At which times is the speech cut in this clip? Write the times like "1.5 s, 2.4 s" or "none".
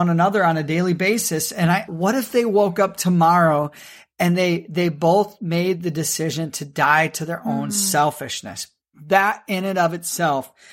1.9 s